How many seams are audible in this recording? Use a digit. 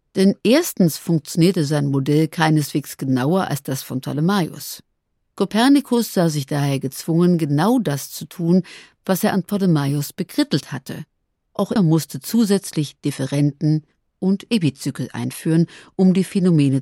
1